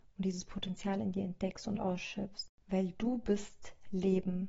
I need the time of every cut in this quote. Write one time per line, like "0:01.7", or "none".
0:02.6